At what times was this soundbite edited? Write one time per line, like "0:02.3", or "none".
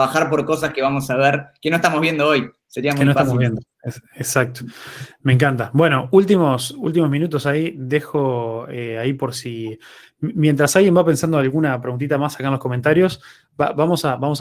none